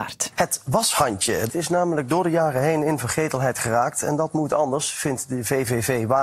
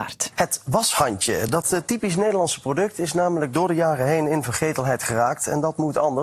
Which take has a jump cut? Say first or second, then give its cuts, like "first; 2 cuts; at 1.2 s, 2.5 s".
first; 1 cut; at 1.5 s